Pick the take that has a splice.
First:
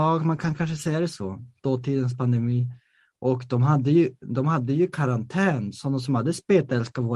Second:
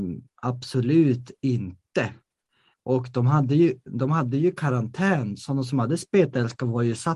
second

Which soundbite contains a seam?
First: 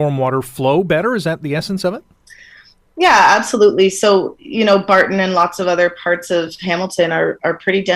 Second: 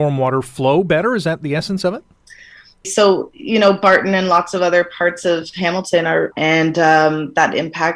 second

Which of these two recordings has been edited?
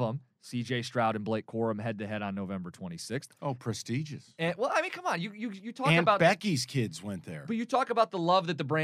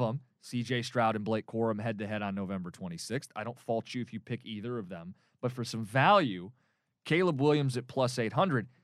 first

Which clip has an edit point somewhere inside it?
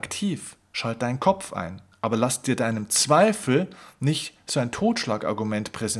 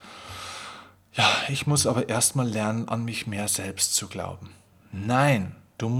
first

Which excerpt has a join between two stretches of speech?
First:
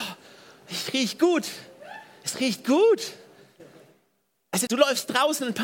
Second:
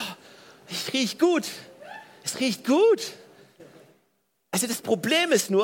first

